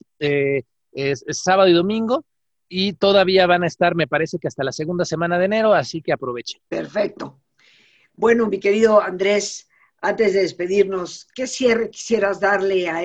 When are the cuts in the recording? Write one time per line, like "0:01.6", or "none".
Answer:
0:06.7